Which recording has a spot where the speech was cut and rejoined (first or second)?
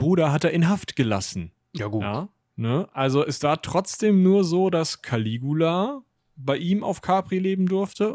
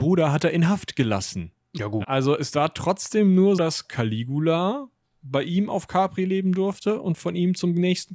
second